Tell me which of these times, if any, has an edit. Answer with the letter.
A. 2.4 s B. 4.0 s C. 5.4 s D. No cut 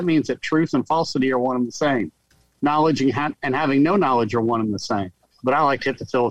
C